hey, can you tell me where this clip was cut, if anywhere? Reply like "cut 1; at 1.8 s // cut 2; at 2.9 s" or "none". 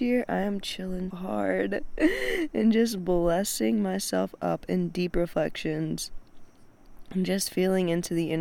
cut 1; at 1.1 s